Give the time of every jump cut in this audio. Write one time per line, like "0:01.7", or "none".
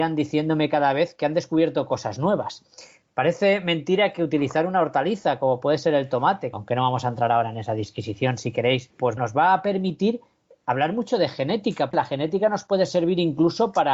0:06.5
0:09.2
0:11.9